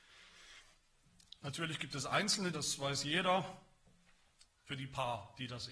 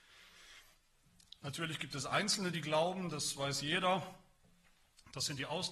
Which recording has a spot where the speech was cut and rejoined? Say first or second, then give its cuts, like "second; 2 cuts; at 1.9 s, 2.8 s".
first; 2 cuts; at 2.5 s, 4.4 s